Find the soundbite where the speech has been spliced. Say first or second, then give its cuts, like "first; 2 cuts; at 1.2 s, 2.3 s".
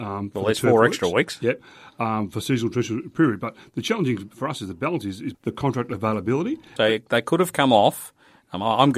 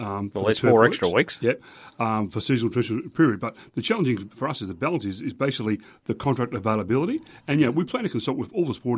first; 2 cuts; at 5.3 s, 6.8 s